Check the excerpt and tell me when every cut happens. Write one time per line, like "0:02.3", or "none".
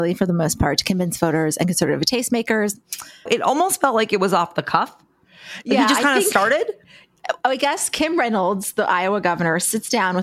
0:03.3